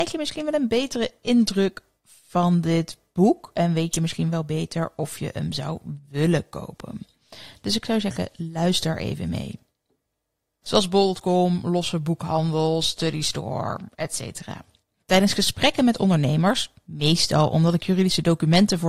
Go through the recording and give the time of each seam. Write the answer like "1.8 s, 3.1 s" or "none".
10.6 s, 15.0 s